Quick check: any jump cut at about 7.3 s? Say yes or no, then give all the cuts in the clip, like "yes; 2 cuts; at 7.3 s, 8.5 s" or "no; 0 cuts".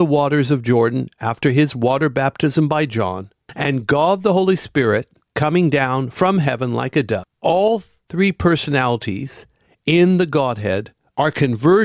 no; 0 cuts